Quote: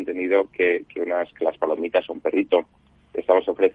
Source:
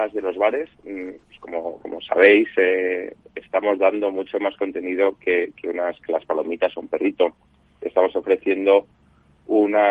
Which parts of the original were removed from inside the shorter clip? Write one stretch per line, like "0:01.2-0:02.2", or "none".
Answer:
none